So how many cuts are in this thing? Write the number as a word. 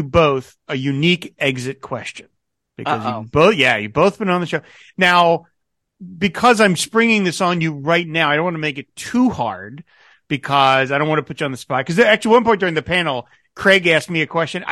zero